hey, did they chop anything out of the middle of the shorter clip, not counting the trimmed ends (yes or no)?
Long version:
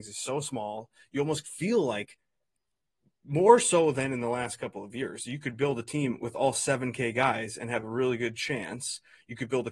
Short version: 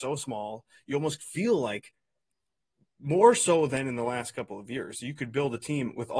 no